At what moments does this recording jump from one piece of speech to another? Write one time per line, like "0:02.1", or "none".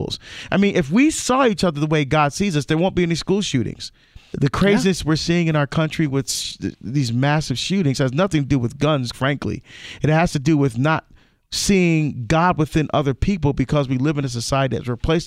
0:04.3
0:09.1